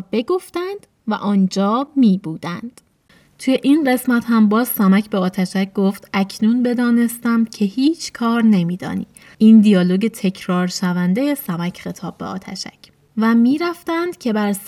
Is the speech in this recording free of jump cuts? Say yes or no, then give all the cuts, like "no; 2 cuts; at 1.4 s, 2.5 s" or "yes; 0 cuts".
yes; 0 cuts